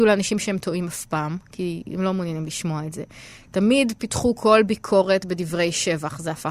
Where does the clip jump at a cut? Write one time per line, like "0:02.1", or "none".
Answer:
none